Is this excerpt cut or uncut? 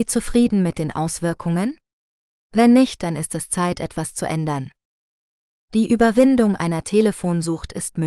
uncut